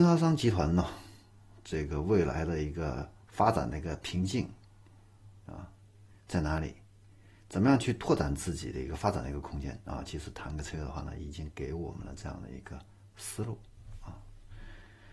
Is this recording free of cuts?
yes; 0 cuts

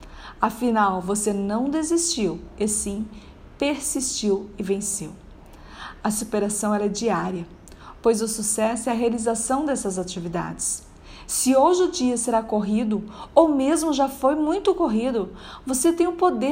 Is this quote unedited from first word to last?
yes; 0 cuts

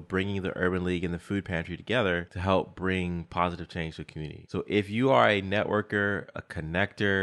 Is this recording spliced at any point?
no; 0 cuts

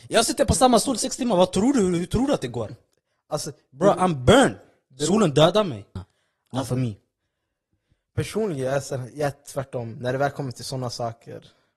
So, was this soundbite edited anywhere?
yes; 1 cut; at 6.0 s

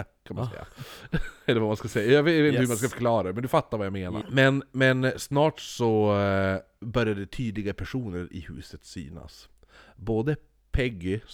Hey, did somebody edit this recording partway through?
yes; 2 cuts; at 4.2 s, 6.8 s

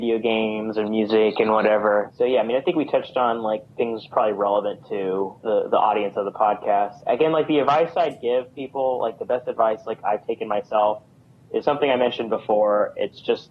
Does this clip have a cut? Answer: no; 0 cuts

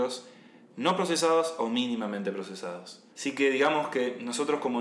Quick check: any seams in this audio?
yes; 1 cut; at 3.1 s

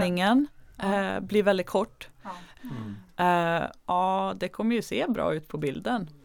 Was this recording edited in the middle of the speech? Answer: yes; 2 cuts; at 2.6 s, 3.8 s

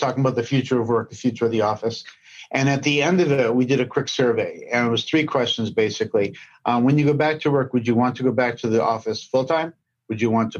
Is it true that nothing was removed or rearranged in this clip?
yes; 0 cuts

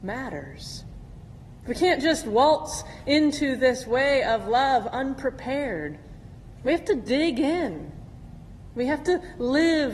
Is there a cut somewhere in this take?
no; 0 cuts

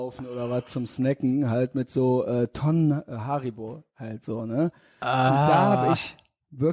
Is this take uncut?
yes; 0 cuts

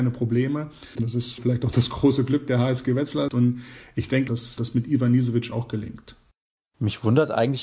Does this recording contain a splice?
yes; 3 cuts; at 1.0 s, 3.3 s, 4.3 s

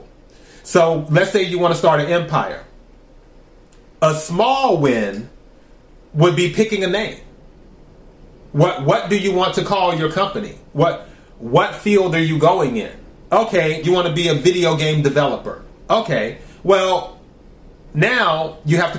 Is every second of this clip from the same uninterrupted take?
no; 1 cut; at 13.8 s

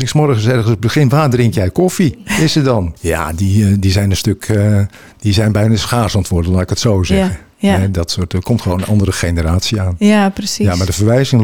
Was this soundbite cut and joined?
yes; 1 cut; at 3.0 s

